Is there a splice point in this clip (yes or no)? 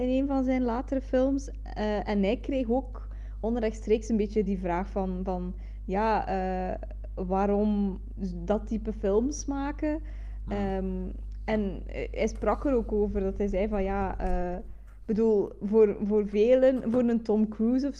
no